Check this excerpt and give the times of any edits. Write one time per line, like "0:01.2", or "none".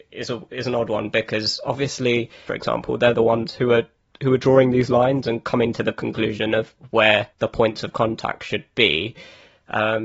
0:02.5
0:07.3